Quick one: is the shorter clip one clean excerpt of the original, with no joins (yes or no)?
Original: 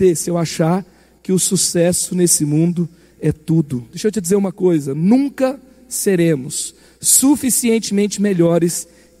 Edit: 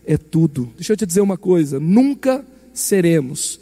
yes